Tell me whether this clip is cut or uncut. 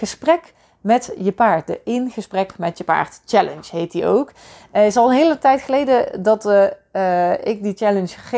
uncut